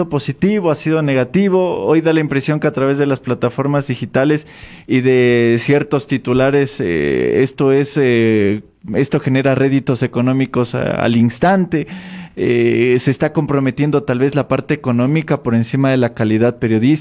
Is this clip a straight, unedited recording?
yes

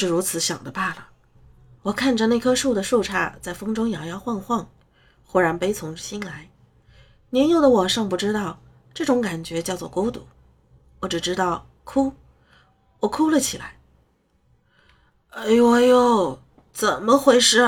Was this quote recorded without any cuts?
yes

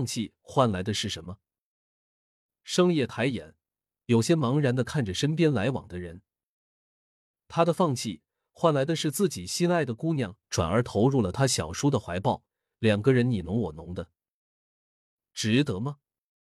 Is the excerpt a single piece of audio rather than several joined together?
yes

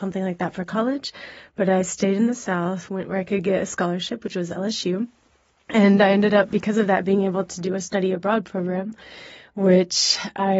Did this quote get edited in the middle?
no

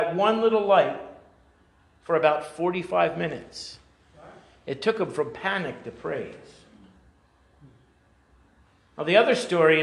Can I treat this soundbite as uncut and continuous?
yes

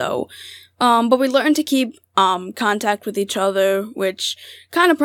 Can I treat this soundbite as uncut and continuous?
yes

